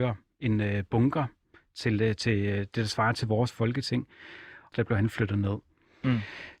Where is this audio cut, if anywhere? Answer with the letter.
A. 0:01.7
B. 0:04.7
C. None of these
B